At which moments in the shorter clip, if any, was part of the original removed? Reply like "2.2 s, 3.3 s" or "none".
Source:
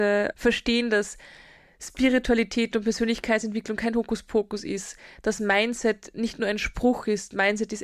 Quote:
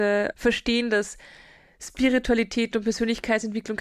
none